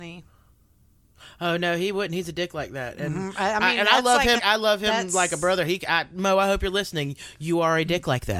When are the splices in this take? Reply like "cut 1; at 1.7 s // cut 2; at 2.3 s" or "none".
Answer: cut 1; at 4.4 s